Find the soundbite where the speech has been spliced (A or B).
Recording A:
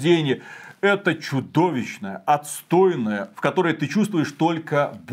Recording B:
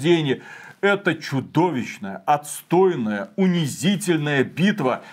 A